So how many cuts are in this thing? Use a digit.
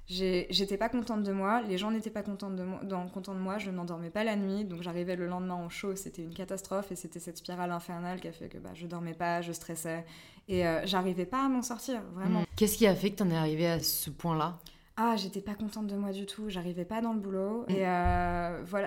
3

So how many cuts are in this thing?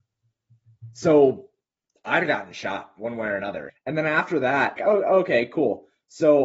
2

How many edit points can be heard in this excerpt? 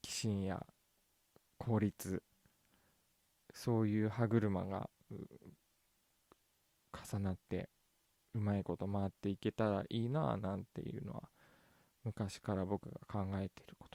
0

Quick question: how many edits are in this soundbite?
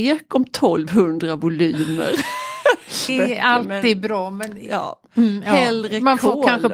1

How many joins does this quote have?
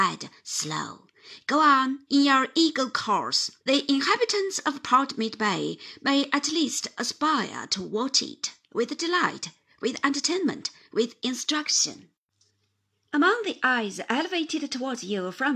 2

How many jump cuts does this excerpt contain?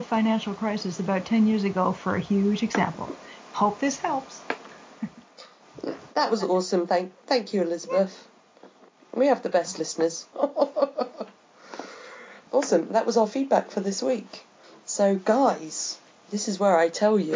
2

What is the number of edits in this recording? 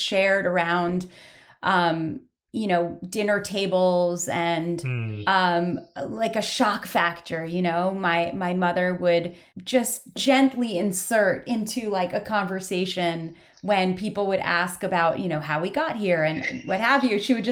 0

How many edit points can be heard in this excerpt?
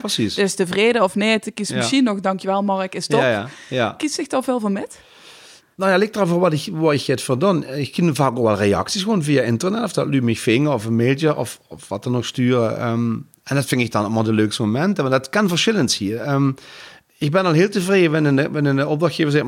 1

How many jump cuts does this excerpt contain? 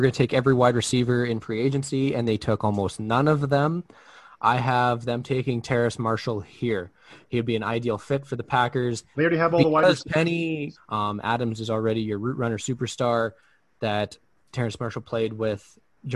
2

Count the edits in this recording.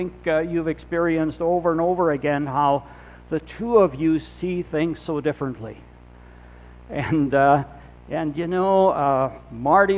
0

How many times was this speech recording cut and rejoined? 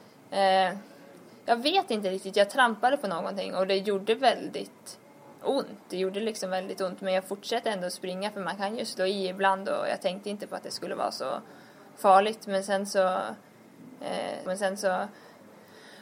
1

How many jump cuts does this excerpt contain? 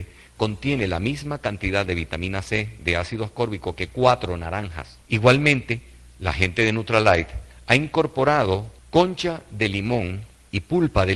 2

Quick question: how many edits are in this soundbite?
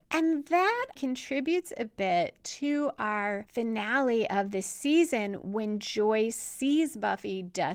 1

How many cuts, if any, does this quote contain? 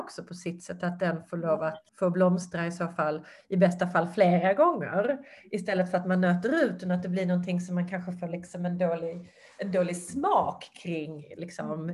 1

